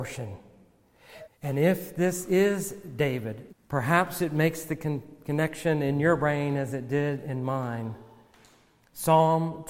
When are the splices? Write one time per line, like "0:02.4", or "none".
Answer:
0:01.2
0:03.5